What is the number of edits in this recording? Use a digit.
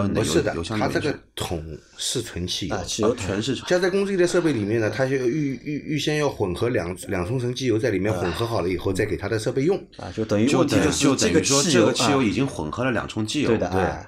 1